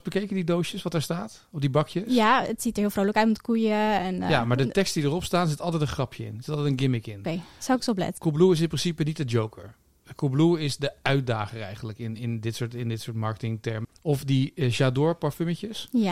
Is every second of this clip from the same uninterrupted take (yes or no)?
no